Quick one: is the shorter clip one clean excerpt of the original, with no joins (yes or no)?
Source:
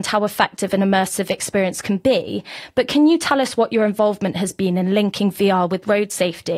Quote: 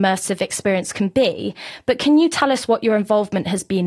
yes